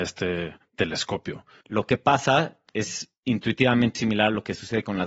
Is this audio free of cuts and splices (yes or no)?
no